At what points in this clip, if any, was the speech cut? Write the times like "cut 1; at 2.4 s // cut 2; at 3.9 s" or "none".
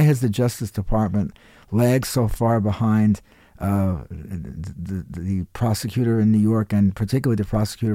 none